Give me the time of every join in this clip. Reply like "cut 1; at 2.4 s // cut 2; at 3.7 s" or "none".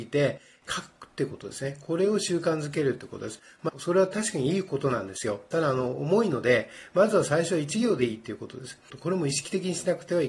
cut 1; at 3.7 s // cut 2; at 8.9 s